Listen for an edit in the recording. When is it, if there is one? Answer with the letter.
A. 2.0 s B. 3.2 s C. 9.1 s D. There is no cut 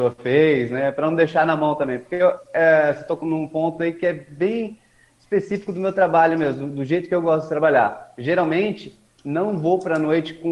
B